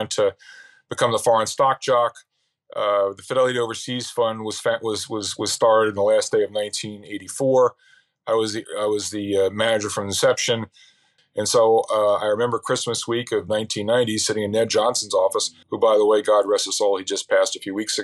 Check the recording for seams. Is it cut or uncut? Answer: cut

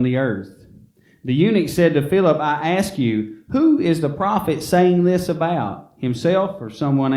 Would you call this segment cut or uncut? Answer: uncut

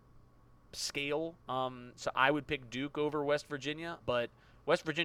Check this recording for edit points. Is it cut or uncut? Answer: cut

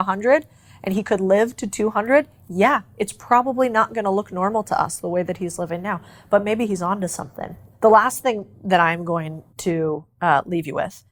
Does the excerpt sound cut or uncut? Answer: uncut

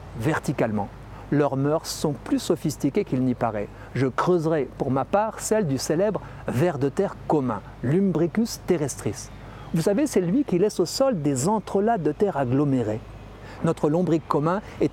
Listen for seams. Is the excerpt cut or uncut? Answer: cut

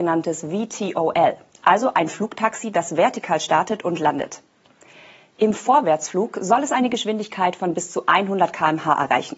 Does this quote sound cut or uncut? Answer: uncut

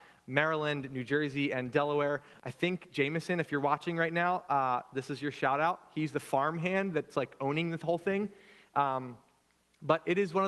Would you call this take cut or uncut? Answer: uncut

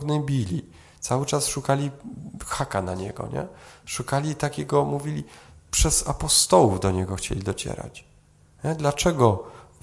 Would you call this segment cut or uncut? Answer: uncut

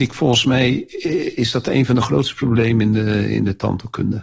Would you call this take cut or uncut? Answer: uncut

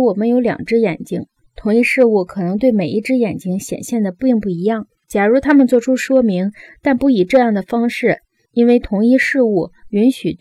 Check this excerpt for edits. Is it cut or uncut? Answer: cut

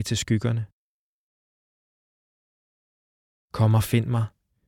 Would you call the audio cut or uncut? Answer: uncut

